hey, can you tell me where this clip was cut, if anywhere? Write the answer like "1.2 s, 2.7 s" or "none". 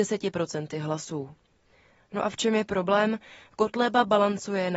none

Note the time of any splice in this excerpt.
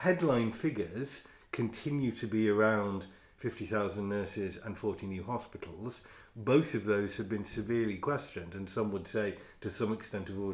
none

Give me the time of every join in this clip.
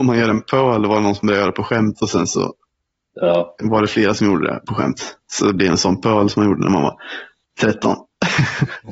none

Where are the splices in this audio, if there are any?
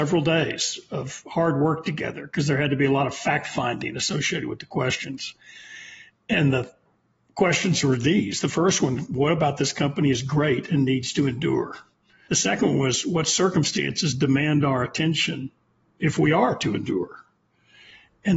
12.3 s

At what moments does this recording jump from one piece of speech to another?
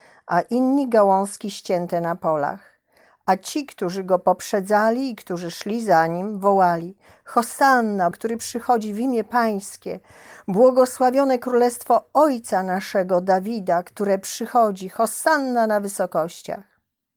8.1 s

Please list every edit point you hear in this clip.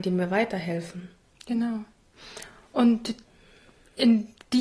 none

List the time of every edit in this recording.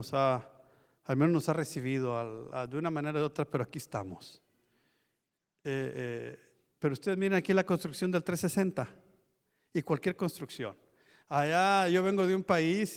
none

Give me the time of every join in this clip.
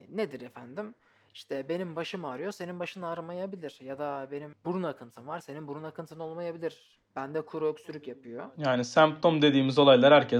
none

